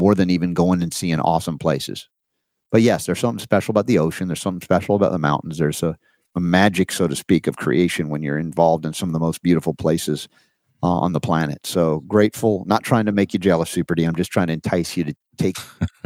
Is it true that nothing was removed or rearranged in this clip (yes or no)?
yes